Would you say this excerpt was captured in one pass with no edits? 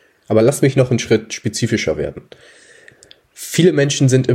yes; 0 cuts

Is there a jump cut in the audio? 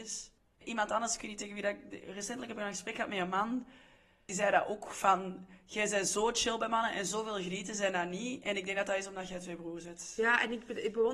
no; 0 cuts

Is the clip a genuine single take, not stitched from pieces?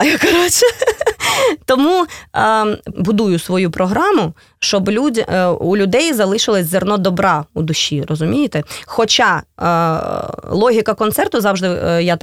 no; 1 cut; at 2.9 s

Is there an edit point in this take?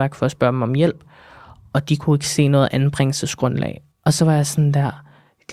yes; 1 cut; at 3.9 s

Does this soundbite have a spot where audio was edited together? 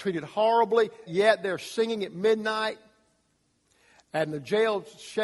yes; 1 cut; at 1.1 s

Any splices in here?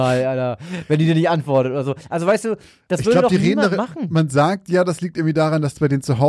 no; 0 cuts

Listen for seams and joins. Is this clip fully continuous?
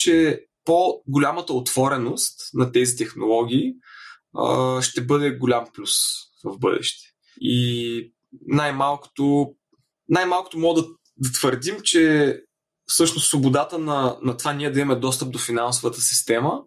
yes; 0 cuts

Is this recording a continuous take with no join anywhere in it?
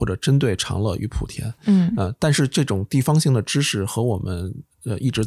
yes; 0 cuts

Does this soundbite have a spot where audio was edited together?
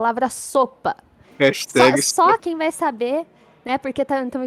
yes; 2 cuts; at 1.2 s, 2.4 s

